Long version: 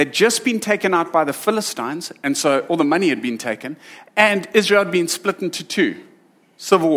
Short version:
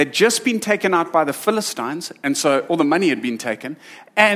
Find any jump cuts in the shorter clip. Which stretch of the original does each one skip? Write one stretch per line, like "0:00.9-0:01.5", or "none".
none